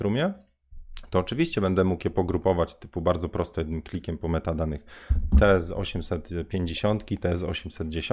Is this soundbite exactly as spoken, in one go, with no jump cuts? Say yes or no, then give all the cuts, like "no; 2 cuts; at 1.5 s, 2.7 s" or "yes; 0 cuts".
yes; 0 cuts